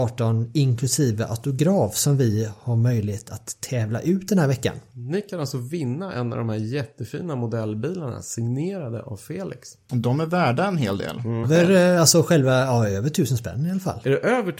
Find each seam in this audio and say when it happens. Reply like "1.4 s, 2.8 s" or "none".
11.4 s